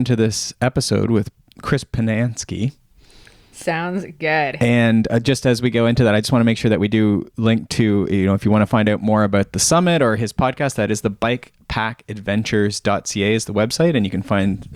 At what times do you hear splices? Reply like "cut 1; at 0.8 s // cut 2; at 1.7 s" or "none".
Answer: none